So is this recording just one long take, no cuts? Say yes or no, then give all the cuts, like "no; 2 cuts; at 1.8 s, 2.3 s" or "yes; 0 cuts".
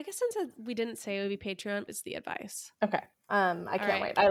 no; 2 cuts; at 1.9 s, 3.1 s